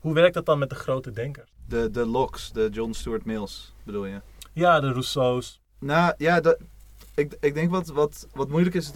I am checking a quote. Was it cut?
no; 0 cuts

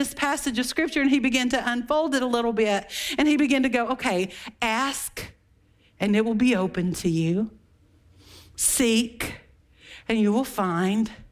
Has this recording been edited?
no; 0 cuts

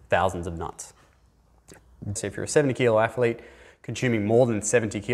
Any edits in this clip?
yes; 1 cut; at 2.2 s

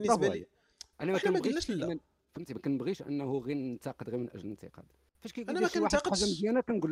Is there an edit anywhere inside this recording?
no; 0 cuts

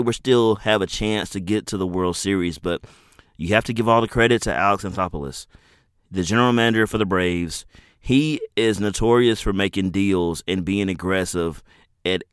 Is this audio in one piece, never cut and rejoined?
yes; 0 cuts

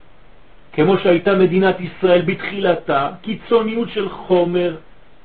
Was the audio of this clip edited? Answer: no; 0 cuts

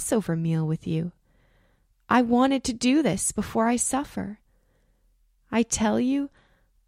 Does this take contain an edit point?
no; 0 cuts

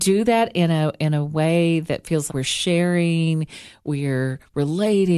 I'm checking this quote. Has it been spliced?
yes; 1 cut; at 2.3 s

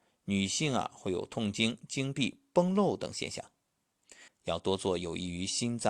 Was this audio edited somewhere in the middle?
yes; 1 cut; at 4.3 s

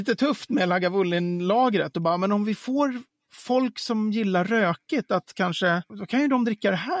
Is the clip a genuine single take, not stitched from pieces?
no; 1 cut; at 5.9 s

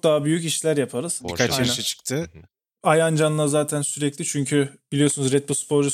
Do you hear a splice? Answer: yes; 2 cuts; at 1.2 s, 2.8 s

